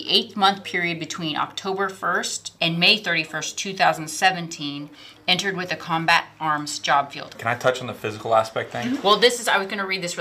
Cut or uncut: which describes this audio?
cut